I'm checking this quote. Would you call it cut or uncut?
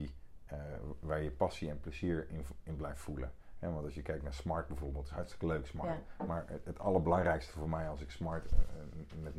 uncut